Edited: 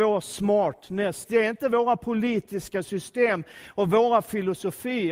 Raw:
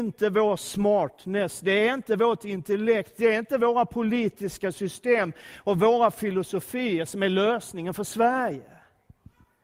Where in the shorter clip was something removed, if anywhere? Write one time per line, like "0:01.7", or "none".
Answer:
0:01.2